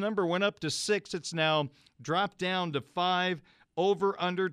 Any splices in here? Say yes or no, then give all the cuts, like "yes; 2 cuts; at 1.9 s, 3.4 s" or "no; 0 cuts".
no; 0 cuts